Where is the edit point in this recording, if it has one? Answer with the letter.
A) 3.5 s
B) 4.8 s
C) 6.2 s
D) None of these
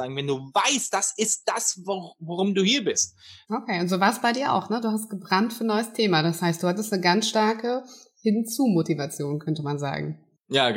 A